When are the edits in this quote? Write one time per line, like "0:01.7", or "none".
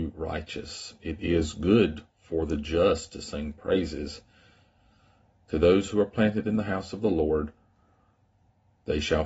0:05.4

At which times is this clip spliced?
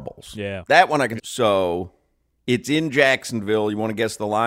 0:01.2

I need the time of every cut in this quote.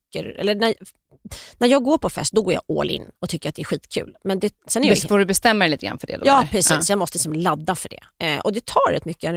none

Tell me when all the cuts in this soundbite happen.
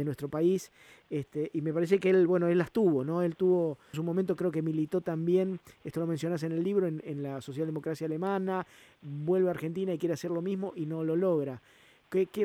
0:03.9

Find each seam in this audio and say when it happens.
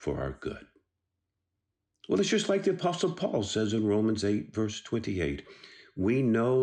none

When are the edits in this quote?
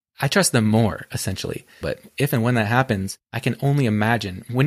0:01.8
0:03.2

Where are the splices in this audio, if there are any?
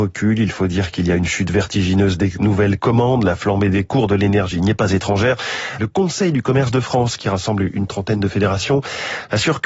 0:05.8

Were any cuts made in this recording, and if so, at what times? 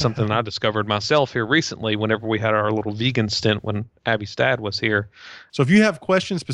0:05.5

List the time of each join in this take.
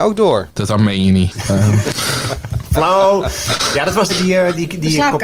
0:04.1

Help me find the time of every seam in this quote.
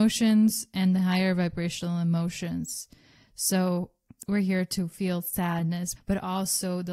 0:06.0

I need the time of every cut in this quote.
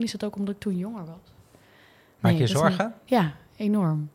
none

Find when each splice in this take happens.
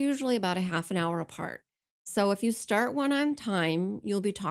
none

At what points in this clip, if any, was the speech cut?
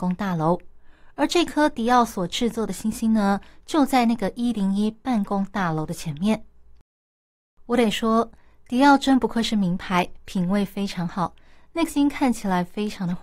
0:11.9

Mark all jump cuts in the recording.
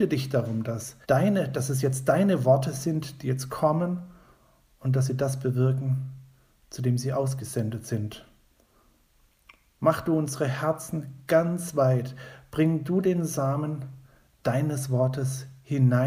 0:01.0

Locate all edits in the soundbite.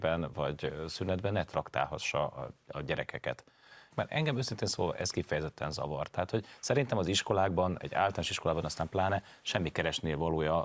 0:03.9

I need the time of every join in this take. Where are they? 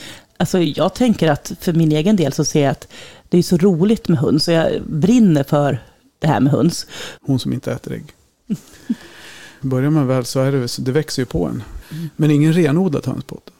0:07.2
0:09.6
0:11.8

